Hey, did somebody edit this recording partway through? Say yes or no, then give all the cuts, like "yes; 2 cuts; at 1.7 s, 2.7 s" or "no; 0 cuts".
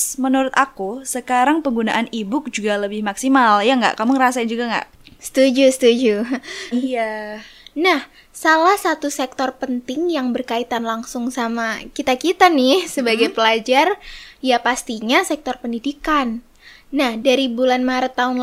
yes; 1 cut; at 6.7 s